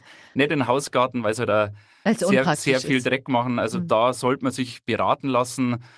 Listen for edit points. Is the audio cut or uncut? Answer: uncut